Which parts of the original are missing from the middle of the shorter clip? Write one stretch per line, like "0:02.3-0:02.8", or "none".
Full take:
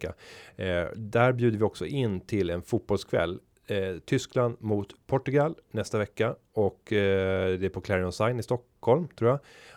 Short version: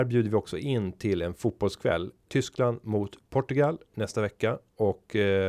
0:03.5-0:04.0

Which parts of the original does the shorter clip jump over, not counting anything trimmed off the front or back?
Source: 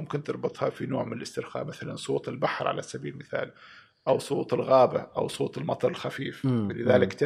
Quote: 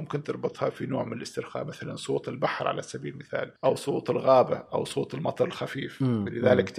0:03.6-0:04.0

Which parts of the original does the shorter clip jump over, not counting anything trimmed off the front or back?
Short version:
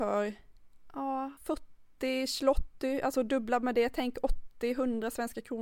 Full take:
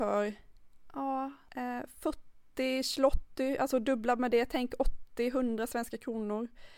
0:01.4-0:01.9

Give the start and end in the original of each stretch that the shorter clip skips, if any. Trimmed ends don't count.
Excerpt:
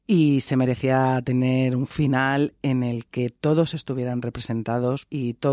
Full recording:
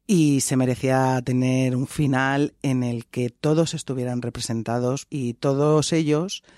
none

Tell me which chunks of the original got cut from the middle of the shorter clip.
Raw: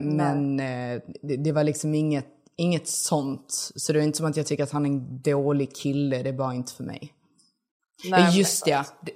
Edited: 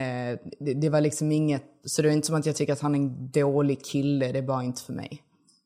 0:02.4-0:03.7

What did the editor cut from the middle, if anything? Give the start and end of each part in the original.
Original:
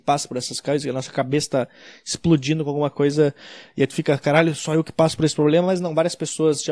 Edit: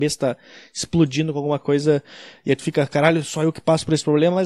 none

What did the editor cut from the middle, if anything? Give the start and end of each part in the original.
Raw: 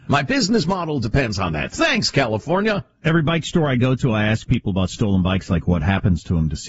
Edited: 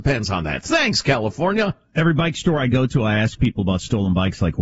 none

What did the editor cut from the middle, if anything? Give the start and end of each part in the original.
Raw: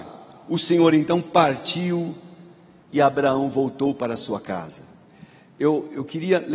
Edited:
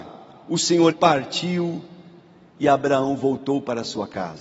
0:00.9-0:01.2

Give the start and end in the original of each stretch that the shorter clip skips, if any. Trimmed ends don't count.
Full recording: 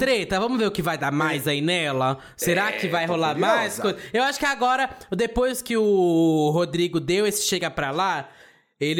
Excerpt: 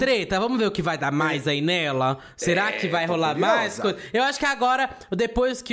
none

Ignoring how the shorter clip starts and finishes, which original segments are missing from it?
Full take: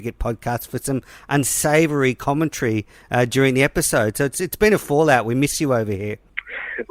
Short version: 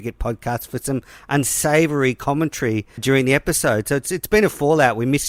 0:03.0-0:03.3

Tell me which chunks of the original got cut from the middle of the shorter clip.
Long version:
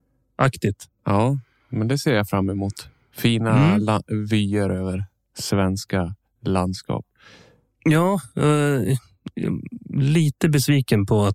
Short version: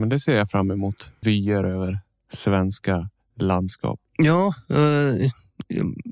0:03.0-0:04.3
0:07.1-0:07.7

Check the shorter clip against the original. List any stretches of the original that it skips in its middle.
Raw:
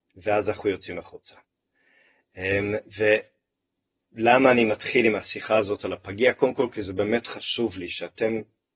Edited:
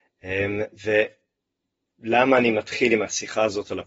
none

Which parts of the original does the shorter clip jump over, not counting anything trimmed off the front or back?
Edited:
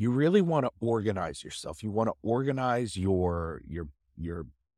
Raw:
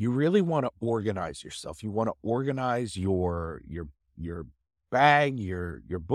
none

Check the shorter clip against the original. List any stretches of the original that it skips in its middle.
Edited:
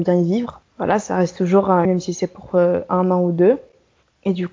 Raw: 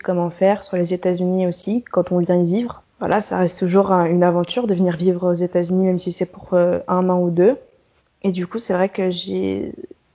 0:04.1-0:05.8

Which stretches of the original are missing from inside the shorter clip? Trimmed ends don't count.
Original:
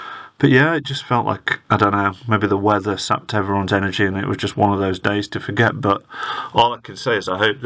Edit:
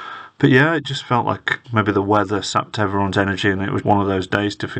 0:01.6-0:02.2
0:04.4-0:04.5

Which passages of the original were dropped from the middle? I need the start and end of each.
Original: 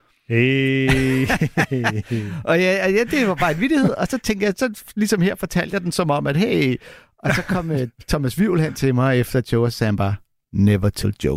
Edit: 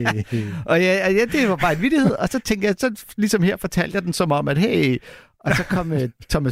none

